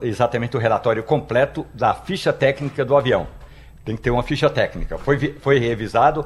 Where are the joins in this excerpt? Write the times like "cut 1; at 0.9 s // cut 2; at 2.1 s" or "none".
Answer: none